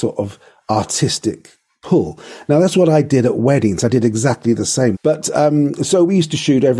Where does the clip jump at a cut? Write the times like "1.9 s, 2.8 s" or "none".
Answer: 4.9 s